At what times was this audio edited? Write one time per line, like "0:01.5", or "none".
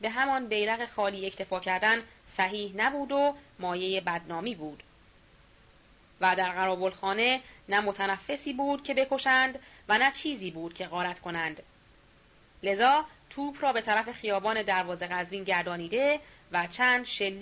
none